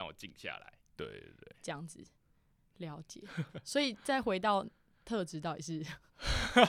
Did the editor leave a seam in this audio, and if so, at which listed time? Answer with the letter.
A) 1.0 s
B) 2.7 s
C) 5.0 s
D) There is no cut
A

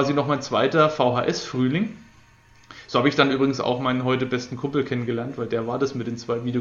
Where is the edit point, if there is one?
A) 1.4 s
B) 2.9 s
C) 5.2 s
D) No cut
D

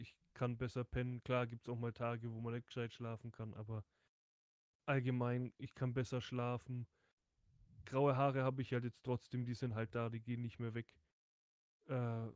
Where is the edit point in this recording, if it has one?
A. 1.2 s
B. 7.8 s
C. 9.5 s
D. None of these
D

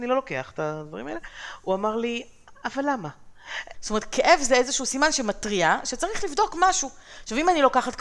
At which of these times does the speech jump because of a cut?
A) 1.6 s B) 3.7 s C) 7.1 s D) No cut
B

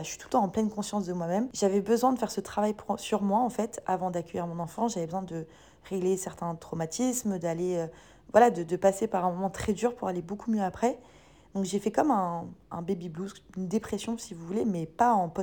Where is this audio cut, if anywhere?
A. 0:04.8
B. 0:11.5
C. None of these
C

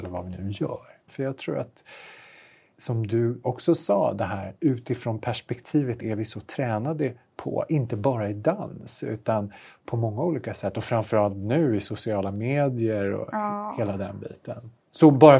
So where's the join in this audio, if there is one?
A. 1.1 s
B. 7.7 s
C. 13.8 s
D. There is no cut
A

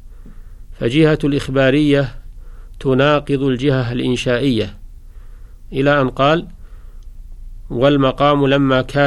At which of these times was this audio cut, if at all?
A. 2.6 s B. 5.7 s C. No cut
B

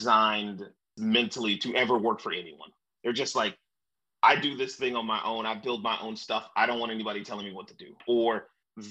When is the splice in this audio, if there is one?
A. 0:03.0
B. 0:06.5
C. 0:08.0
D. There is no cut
A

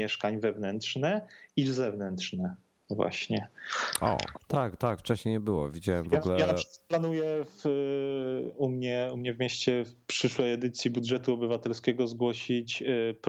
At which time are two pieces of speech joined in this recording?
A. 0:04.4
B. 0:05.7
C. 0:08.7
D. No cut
A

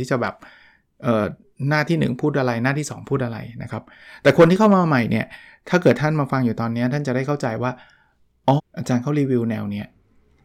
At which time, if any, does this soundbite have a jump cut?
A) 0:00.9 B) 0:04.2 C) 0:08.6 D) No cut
C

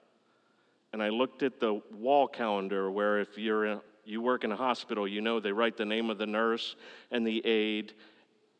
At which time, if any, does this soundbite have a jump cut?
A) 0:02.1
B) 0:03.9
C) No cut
C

